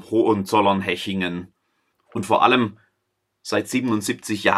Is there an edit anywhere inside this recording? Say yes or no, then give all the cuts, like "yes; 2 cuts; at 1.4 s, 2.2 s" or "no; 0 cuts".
yes; 1 cut; at 1.9 s